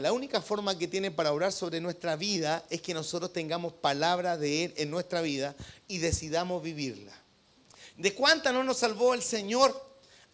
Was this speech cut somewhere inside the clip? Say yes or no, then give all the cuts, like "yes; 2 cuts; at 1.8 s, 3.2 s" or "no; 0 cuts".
no; 0 cuts